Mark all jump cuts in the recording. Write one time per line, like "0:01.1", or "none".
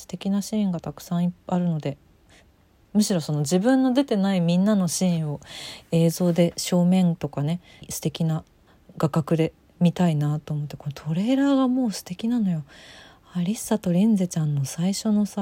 0:07.8